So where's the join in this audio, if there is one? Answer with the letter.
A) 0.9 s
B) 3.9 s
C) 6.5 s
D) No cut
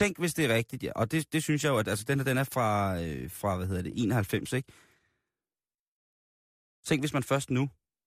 D